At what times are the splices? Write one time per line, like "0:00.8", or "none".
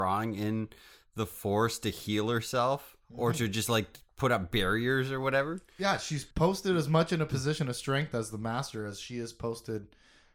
0:06.3